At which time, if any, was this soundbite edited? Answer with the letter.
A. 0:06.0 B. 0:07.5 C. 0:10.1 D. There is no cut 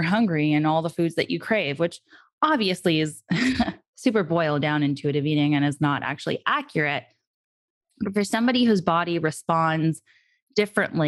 D